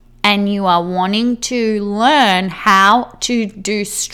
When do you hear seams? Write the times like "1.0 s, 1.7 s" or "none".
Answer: none